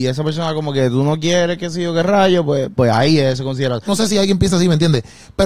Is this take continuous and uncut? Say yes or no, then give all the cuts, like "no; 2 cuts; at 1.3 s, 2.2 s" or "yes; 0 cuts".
no; 2 cuts; at 2.8 s, 3.8 s